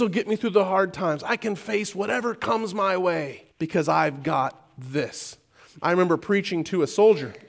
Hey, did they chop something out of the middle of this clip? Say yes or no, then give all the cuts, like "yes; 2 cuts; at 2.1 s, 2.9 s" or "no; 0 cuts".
yes; 1 cut; at 3.5 s